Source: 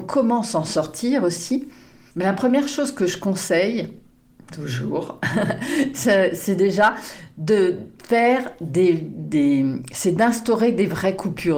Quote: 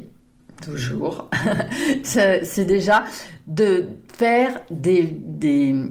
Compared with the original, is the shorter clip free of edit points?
yes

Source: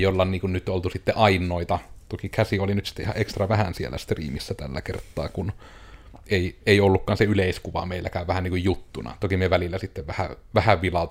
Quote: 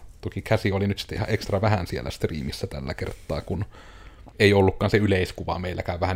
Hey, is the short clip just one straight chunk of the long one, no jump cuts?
no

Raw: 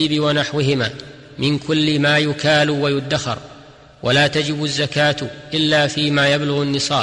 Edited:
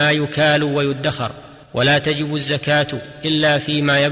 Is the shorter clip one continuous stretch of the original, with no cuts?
no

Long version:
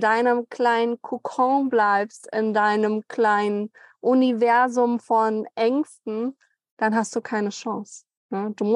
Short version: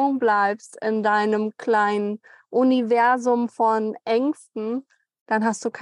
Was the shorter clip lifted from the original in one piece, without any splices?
yes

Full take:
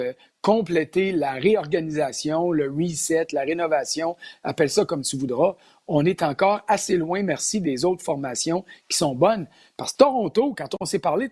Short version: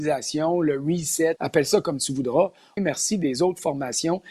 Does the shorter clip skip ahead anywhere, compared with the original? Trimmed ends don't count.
yes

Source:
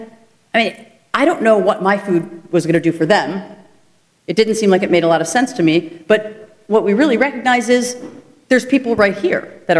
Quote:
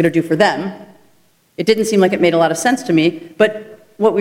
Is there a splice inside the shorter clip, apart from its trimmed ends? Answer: no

